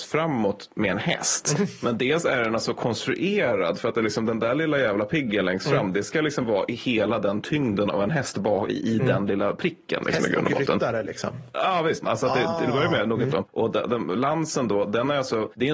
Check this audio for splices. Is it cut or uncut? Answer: cut